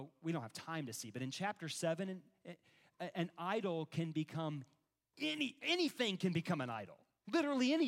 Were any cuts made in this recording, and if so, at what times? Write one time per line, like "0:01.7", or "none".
none